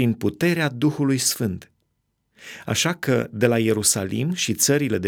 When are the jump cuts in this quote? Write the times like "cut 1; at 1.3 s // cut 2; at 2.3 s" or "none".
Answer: none